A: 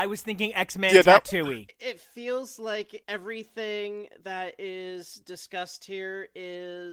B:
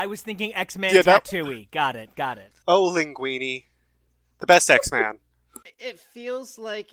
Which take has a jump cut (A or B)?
A